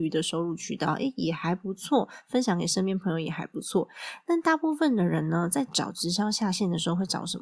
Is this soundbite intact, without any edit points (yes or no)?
yes